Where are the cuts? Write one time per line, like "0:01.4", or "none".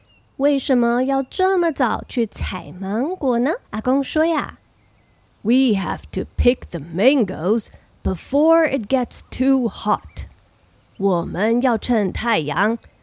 0:03.6